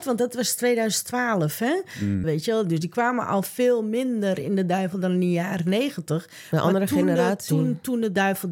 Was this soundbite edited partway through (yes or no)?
yes